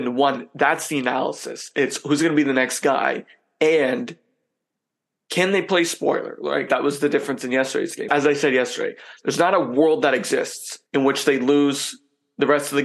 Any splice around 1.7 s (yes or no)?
no